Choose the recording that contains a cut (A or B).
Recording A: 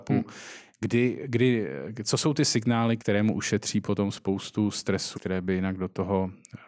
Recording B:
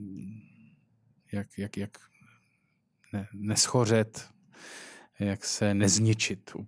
A